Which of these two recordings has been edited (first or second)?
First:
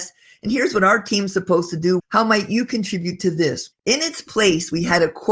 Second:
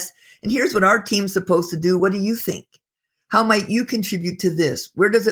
first